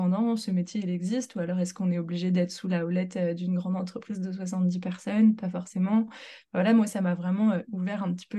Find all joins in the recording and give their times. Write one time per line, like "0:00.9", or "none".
none